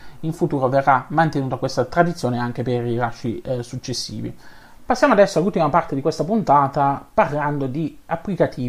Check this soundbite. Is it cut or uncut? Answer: cut